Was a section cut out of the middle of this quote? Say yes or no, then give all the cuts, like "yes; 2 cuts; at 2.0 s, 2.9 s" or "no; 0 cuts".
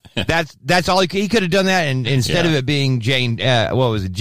no; 0 cuts